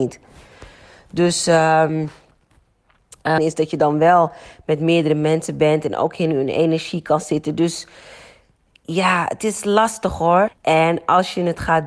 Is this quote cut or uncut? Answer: cut